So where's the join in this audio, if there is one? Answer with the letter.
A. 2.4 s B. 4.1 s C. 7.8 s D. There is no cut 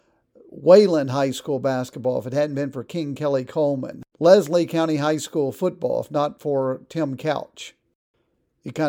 B